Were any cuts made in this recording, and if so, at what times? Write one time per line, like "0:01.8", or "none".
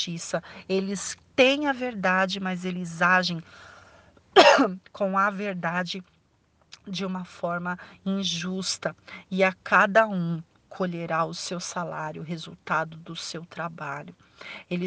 none